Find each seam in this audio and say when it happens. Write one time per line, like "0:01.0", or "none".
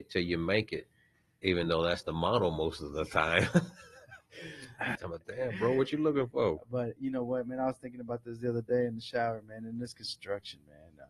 0:05.0